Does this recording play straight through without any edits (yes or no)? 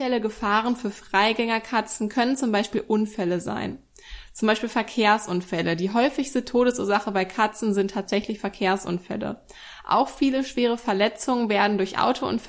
yes